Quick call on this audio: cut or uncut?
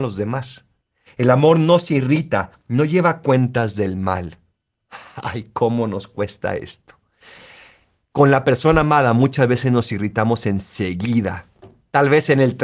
cut